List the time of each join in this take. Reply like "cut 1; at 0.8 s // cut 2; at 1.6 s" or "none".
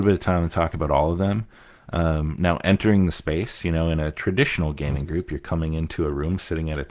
none